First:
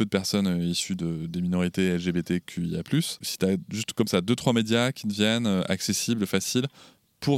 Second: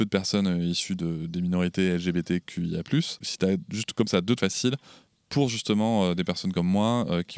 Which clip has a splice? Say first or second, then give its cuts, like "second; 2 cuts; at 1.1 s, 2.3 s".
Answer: second; 1 cut; at 4.4 s